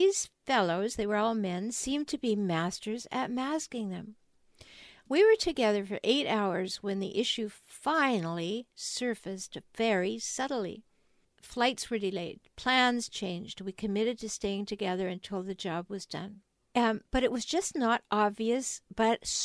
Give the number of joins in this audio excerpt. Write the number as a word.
two